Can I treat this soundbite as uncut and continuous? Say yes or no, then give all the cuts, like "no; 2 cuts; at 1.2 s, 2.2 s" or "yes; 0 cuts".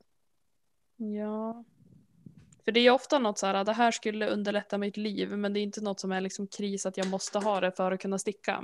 yes; 0 cuts